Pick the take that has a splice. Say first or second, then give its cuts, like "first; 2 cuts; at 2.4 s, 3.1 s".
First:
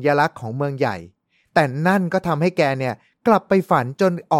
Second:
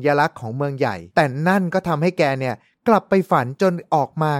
second; 1 cut; at 1.1 s